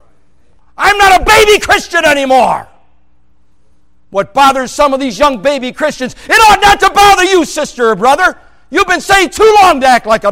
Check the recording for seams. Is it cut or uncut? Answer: uncut